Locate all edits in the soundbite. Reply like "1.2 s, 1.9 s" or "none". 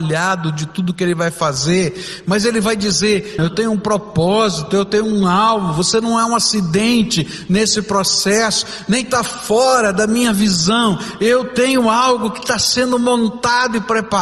3.4 s

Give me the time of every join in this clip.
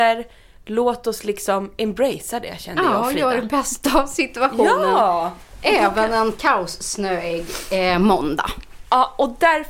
none

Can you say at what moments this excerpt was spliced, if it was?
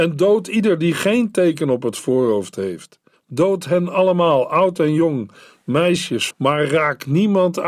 3.1 s, 6.3 s

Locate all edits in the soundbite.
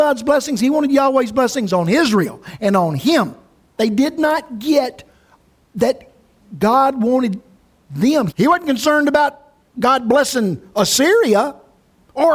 3.8 s, 8.3 s

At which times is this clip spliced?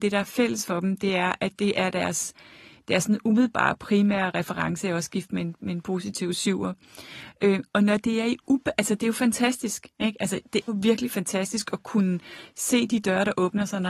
10.7 s

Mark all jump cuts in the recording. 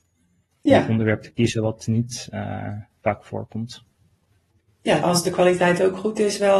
5.0 s

